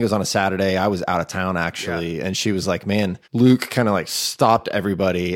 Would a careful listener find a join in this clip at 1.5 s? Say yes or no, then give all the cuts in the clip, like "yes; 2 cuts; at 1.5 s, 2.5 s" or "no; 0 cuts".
no; 1 cut; at 3.2 s